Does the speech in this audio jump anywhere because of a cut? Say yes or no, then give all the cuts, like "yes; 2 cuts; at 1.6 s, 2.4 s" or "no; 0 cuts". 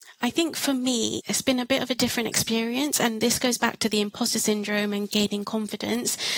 yes; 1 cut; at 1.2 s